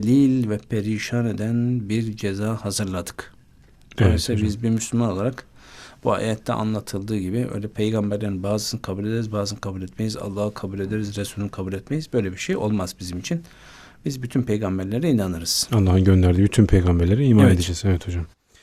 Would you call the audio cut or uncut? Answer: uncut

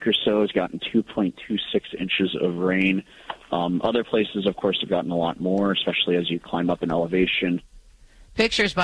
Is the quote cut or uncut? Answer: uncut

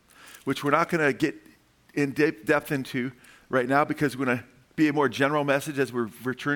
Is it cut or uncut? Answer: uncut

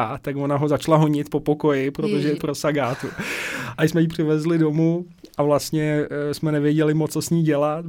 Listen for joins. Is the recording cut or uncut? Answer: cut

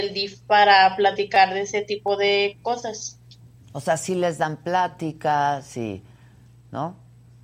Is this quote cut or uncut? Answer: uncut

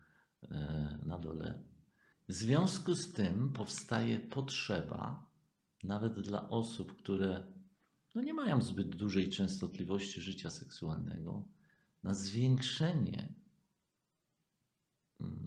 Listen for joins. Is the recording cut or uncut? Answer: cut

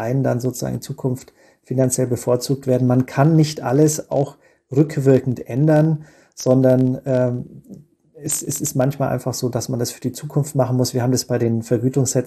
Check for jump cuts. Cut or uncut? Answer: uncut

